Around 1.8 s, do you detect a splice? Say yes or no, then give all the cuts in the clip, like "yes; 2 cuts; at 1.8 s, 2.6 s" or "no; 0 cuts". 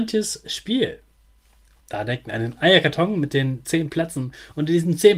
no; 0 cuts